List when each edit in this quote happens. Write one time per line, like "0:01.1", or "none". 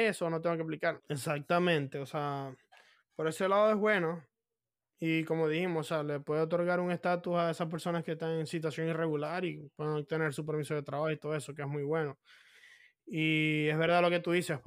0:01.0